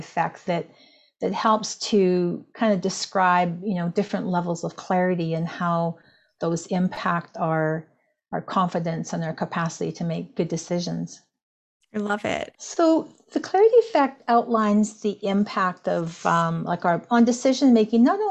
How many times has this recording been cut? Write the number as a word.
two